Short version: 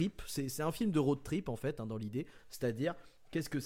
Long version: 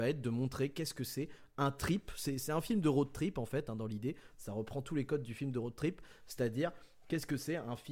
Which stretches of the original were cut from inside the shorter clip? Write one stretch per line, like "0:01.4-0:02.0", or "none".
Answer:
0:04.3-0:06.2